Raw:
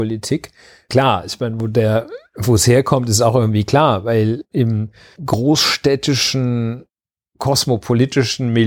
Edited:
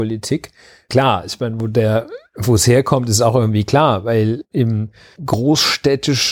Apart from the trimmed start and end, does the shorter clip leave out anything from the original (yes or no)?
no